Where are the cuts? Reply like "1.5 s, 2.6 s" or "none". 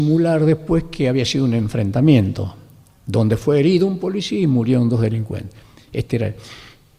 none

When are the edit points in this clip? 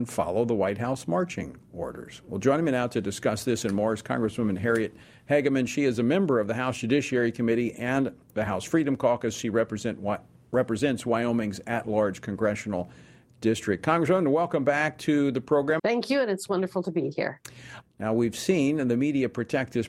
15.8 s, 17.8 s

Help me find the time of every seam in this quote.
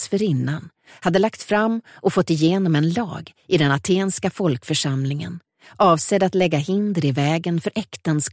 0.9 s

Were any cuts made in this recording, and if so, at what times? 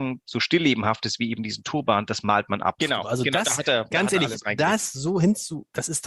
2.8 s

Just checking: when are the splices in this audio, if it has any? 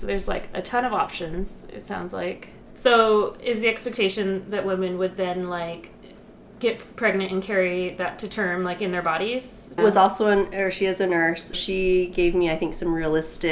2.7 s, 9.8 s, 11.5 s

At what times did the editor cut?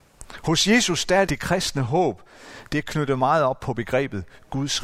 1.3 s

